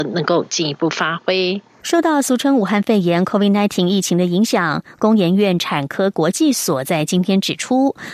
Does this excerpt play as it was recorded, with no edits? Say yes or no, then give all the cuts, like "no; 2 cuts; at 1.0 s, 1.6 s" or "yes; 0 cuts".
no; 1 cut; at 1.8 s